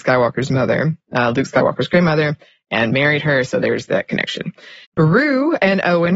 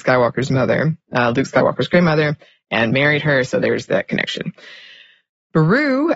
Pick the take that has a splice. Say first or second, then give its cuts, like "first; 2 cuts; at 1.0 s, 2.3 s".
first; 1 cut; at 4.8 s